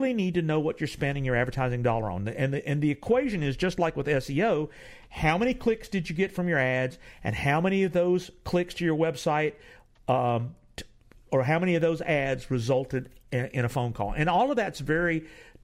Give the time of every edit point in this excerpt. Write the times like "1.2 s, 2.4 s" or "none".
none